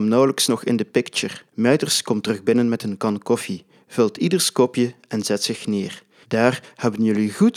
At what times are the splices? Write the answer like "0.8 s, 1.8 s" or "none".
1.5 s, 6.2 s